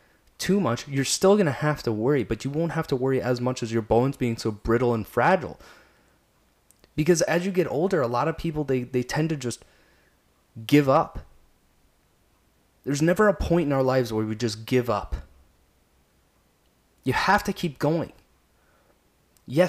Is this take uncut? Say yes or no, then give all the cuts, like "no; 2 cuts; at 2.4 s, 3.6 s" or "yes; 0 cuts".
yes; 0 cuts